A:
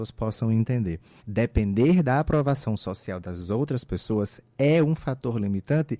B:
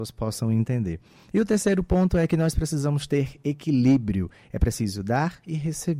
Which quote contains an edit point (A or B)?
A